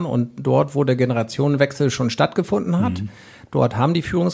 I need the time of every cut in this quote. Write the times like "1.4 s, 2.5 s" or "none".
none